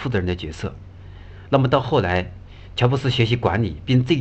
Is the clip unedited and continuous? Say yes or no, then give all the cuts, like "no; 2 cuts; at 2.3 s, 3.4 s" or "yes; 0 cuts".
yes; 0 cuts